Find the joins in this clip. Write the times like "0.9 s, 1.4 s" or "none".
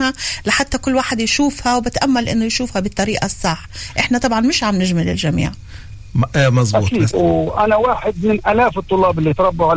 7.1 s